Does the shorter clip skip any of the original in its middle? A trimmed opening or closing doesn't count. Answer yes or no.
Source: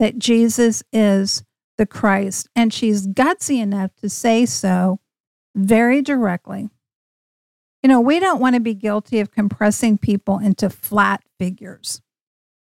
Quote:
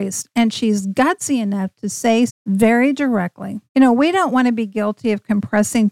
yes